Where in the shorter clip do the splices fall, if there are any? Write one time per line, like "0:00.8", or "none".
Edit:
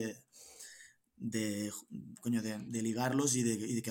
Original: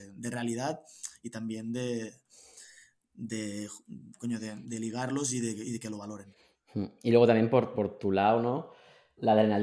none